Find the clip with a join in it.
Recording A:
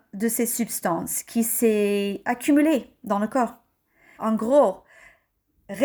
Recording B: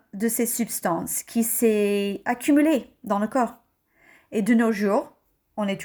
A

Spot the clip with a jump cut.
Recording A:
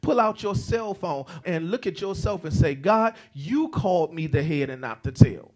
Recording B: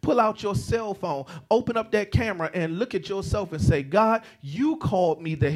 A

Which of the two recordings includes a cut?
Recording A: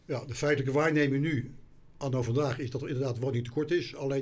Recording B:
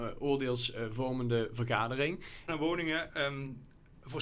B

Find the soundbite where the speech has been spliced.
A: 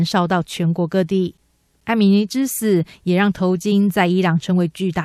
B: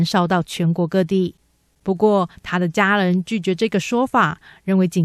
B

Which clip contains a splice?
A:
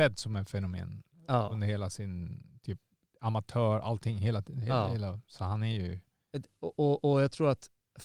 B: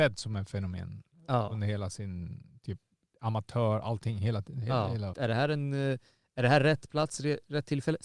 B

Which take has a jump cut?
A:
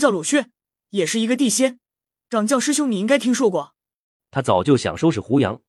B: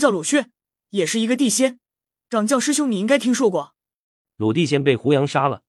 A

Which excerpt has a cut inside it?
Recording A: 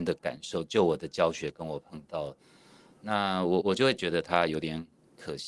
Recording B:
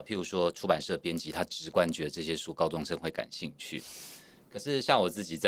A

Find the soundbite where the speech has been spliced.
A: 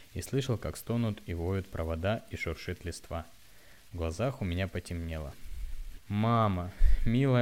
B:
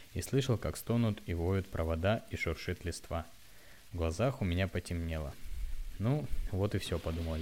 A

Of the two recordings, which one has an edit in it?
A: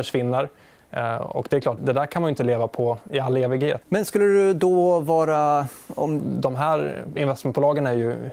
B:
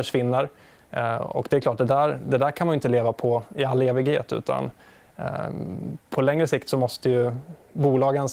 A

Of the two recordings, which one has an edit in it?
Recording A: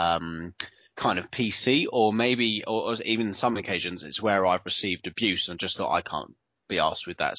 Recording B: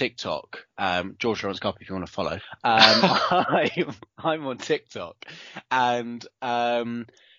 B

